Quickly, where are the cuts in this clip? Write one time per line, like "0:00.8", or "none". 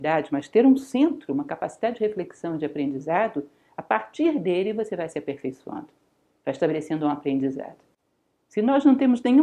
none